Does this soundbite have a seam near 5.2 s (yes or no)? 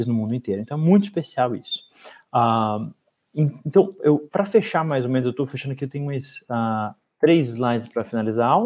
no